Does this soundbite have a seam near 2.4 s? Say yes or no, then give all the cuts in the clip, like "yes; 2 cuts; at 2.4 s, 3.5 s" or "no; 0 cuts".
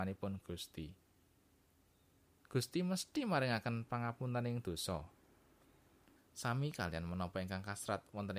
no; 1 cut; at 6.2 s